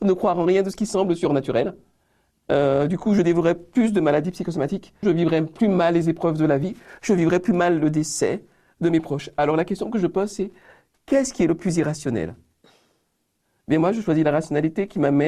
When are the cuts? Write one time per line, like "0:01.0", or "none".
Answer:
0:05.0